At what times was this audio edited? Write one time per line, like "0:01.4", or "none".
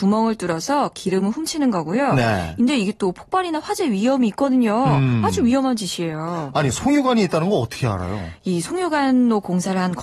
none